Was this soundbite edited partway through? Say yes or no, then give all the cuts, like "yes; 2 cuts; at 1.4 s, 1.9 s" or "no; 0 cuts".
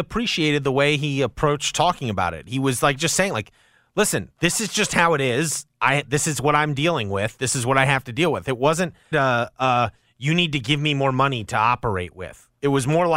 yes; 1 cut; at 9.1 s